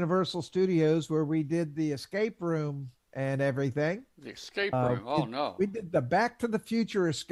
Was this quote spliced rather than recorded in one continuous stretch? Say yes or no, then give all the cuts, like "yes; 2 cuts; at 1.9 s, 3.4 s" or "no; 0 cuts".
no; 0 cuts